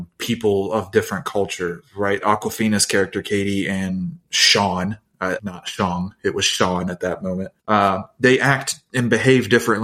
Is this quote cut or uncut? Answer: cut